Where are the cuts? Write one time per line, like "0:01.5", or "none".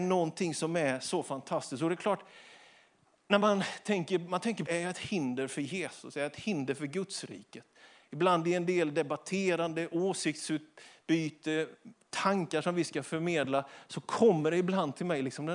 0:04.7